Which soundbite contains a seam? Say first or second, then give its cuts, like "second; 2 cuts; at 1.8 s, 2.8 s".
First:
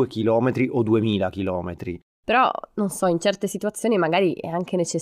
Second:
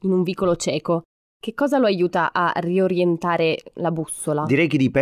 first; 1 cut; at 2.0 s